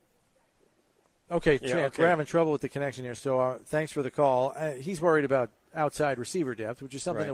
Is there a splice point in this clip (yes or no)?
no